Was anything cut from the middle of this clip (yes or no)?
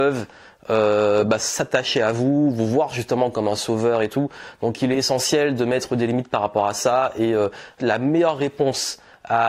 yes